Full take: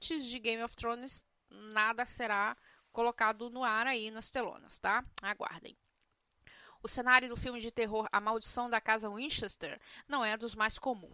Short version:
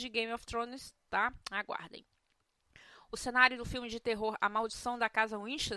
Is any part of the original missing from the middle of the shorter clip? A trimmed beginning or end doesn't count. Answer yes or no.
yes